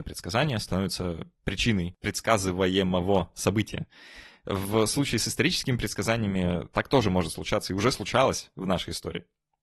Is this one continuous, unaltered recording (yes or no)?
yes